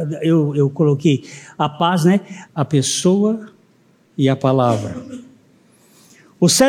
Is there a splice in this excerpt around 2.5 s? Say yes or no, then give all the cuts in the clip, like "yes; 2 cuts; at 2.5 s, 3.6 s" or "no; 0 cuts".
yes; 1 cut; at 2.5 s